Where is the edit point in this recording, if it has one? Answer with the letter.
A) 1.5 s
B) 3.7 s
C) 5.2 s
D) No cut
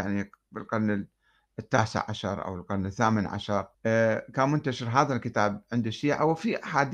B